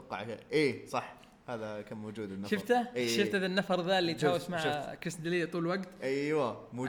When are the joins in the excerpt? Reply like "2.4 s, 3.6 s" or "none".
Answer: none

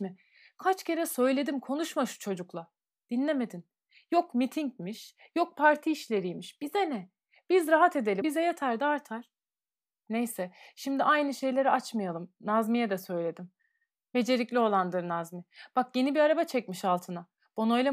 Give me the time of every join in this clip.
8.2 s

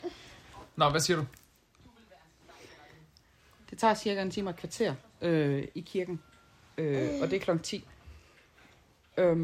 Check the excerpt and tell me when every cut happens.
none

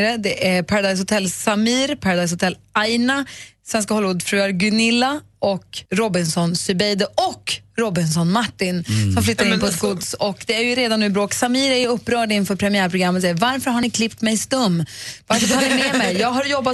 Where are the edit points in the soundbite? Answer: 5.9 s

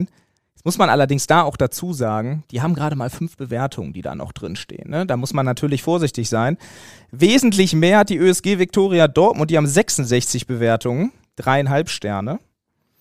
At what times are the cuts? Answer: none

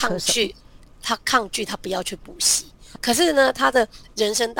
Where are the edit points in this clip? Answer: 3.0 s

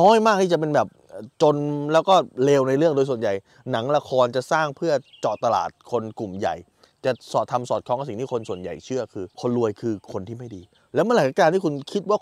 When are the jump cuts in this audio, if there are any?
9.3 s

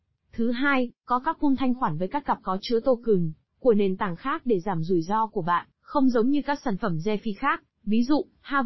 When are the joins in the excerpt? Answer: 5.7 s

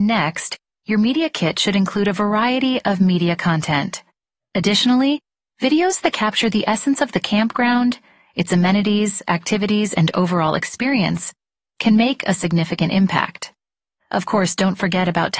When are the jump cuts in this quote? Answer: 4.4 s, 14.0 s

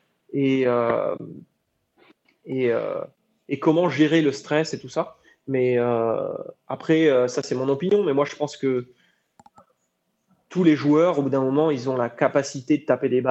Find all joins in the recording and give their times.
none

